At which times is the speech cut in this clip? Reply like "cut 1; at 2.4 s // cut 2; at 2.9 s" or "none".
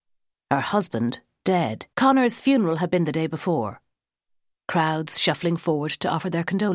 cut 1; at 1.9 s